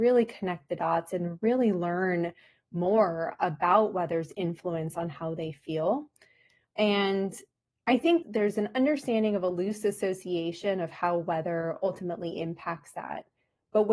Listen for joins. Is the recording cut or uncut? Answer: cut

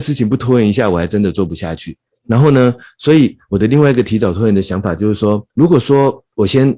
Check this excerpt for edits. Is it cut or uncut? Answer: cut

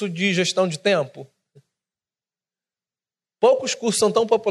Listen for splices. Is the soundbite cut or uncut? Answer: uncut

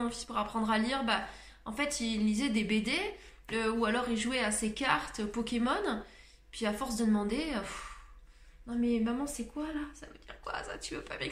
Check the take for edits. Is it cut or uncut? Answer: uncut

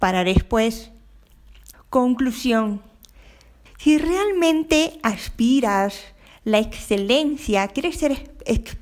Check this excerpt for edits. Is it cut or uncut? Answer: cut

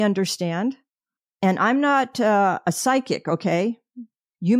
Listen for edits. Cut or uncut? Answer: uncut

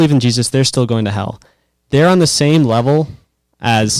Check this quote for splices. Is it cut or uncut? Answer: uncut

